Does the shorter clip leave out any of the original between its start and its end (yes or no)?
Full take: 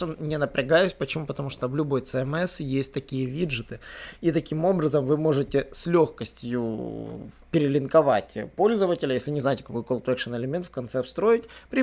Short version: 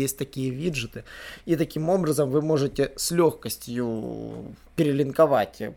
no